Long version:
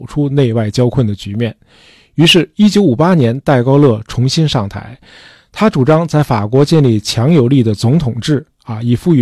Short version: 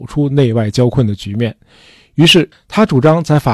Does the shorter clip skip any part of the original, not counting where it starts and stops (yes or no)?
yes